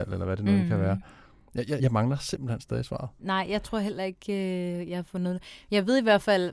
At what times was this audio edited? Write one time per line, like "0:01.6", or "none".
0:01.8
0:03.2